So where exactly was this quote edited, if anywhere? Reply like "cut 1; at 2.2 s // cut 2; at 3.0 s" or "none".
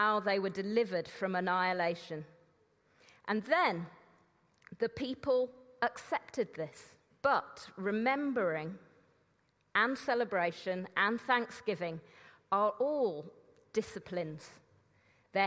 cut 1; at 7.1 s